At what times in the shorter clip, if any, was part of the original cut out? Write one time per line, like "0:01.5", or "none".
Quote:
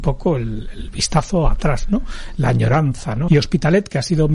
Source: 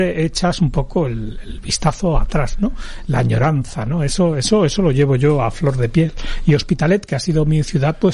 0:03.3